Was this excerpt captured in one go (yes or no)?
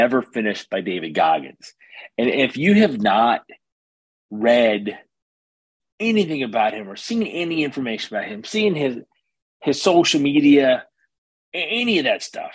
yes